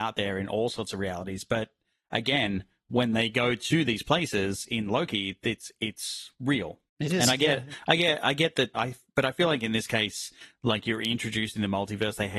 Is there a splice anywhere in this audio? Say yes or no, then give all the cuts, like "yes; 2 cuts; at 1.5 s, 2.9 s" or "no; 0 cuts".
yes; 2 cuts; at 6.9 s, 8.7 s